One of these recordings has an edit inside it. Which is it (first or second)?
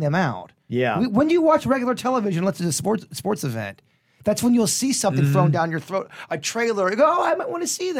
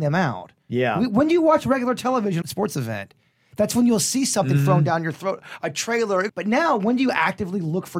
second